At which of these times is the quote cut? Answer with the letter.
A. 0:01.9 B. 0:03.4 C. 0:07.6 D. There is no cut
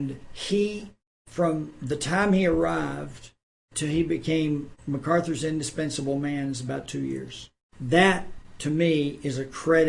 D